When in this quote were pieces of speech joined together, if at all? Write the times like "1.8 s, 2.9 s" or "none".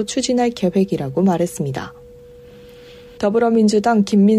3.2 s